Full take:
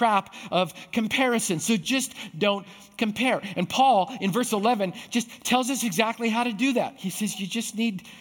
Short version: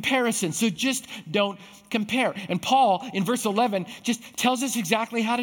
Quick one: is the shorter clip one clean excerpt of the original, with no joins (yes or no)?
yes